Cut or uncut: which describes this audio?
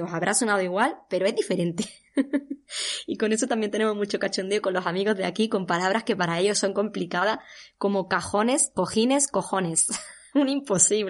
uncut